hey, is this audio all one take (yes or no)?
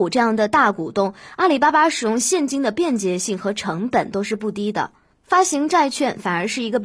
yes